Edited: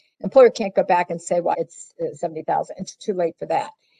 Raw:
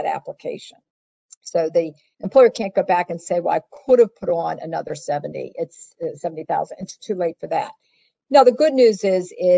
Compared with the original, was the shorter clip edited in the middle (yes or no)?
yes